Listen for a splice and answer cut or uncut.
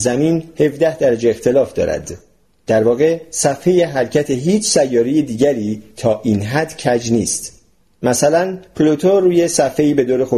cut